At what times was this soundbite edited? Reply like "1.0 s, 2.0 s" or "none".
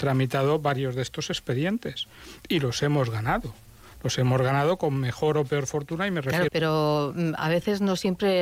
6.5 s

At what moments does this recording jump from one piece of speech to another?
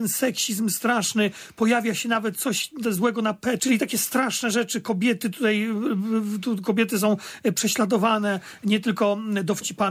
3.6 s

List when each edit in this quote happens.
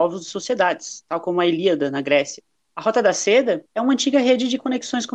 2.6 s

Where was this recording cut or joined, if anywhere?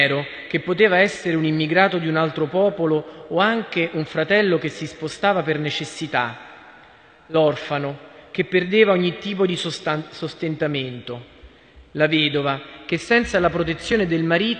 none

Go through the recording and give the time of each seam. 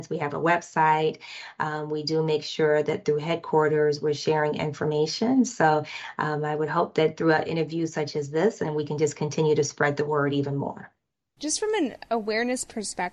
11.4 s

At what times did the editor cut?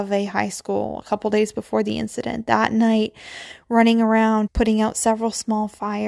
4.5 s

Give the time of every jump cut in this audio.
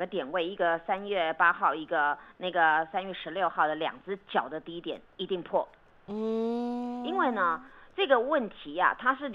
none

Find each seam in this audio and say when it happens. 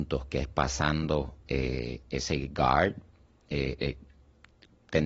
none

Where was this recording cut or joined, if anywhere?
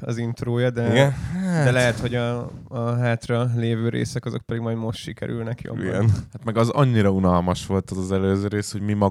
none

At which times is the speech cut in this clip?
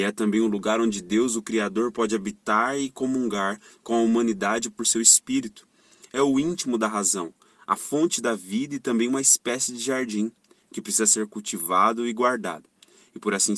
none

